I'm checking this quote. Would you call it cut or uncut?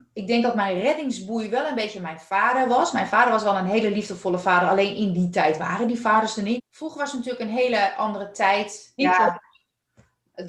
cut